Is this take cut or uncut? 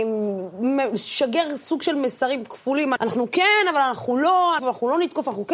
cut